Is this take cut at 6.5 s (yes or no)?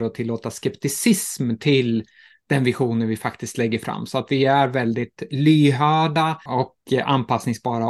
yes